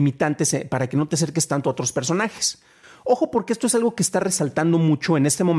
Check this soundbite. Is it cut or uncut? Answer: uncut